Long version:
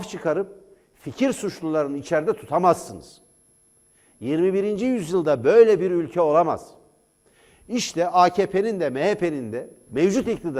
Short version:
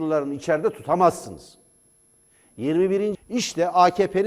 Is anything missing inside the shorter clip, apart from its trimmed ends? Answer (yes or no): yes